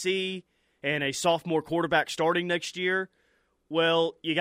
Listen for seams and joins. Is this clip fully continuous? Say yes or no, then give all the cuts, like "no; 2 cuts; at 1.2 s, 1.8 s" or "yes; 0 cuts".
yes; 0 cuts